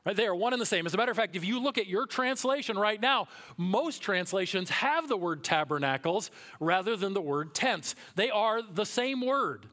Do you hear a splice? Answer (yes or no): no